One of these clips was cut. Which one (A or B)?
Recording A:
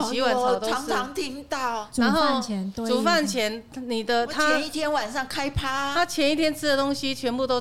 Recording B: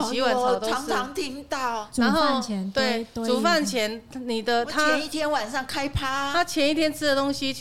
A